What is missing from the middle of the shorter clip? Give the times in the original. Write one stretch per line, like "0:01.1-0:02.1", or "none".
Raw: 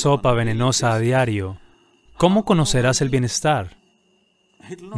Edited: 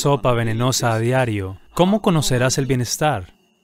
0:01.7-0:02.1